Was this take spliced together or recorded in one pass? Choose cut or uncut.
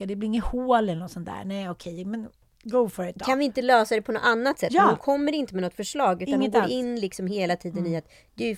uncut